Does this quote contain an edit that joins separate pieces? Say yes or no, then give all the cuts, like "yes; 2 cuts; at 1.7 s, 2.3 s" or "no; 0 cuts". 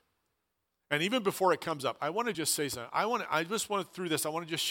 no; 0 cuts